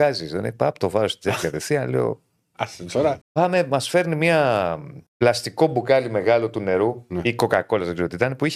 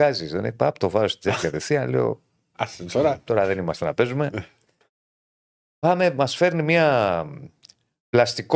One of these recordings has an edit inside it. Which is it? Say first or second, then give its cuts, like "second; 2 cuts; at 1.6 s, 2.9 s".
first; 2 cuts; at 3.2 s, 5.1 s